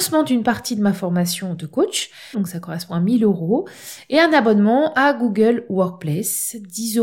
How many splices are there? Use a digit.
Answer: 1